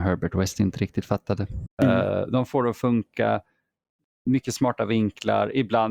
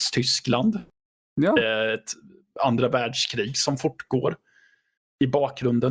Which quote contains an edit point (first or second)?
first